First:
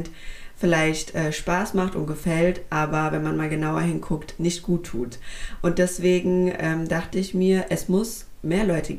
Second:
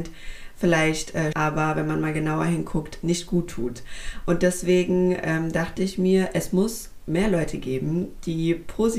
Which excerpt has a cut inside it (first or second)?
second